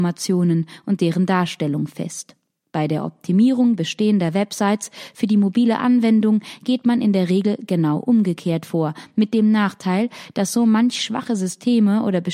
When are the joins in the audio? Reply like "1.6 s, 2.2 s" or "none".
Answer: none